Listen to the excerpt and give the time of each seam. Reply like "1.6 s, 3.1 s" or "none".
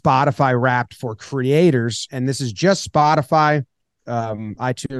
2.1 s, 4.0 s